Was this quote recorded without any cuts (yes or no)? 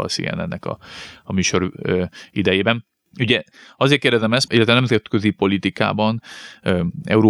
no